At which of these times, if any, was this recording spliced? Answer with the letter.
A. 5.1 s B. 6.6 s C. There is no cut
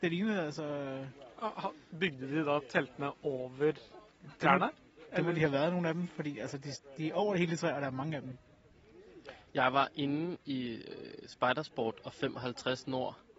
C